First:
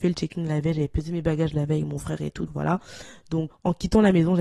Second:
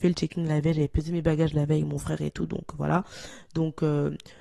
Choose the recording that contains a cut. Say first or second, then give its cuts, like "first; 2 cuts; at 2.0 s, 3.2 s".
first; 2 cuts; at 2.5 s, 3.5 s